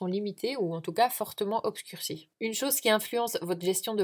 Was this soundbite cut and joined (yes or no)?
yes